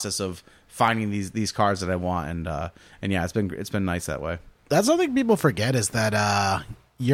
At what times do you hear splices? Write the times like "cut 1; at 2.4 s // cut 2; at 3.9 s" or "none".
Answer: none